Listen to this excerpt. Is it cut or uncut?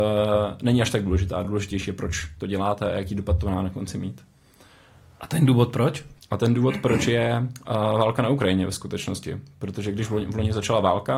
uncut